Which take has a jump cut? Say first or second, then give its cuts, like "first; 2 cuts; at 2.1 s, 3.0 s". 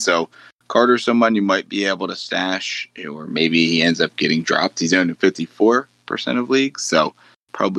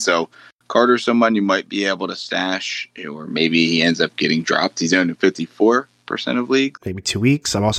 second; 1 cut; at 6.8 s